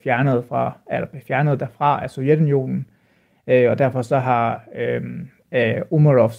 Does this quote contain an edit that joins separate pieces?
no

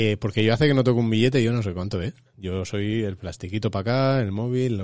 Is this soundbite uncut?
yes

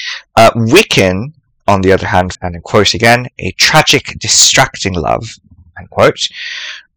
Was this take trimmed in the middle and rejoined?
yes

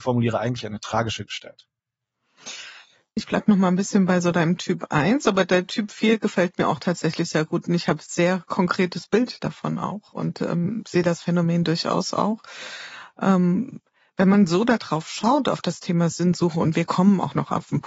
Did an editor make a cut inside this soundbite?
yes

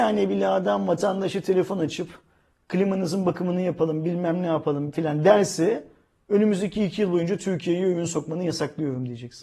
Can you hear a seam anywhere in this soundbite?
yes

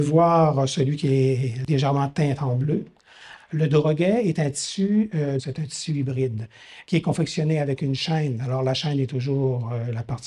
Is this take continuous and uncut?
no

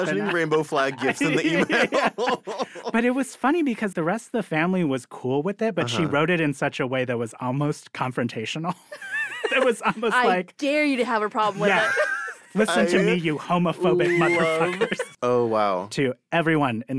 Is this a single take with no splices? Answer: no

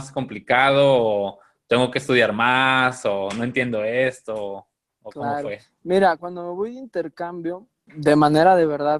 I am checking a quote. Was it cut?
yes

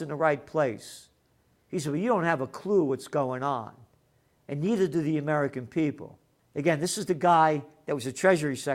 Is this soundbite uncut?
no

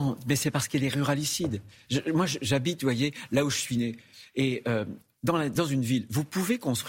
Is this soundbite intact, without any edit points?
no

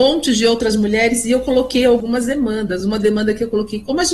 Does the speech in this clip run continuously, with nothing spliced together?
yes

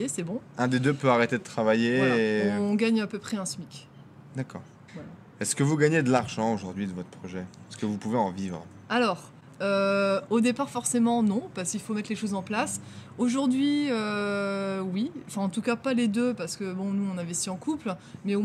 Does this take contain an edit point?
yes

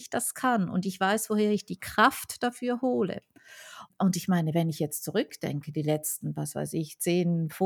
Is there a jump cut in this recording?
no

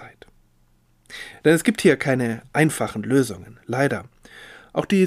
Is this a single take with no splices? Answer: yes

